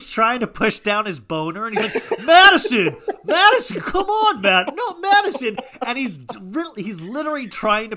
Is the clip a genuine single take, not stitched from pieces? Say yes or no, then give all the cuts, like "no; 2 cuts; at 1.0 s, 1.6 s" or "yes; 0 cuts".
yes; 0 cuts